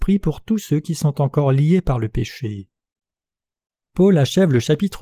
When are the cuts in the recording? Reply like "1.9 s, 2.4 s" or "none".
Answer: 3.8 s